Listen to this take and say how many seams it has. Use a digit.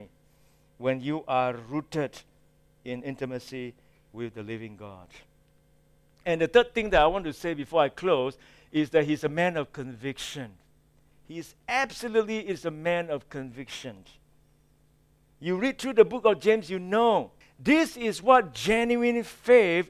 1